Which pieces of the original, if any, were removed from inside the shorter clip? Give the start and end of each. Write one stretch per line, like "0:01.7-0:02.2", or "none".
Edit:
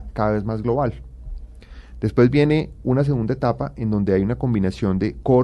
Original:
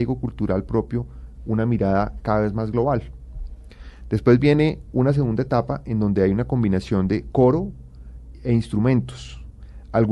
none